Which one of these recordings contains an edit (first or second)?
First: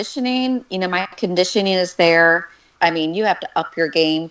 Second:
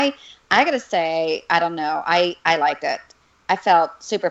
first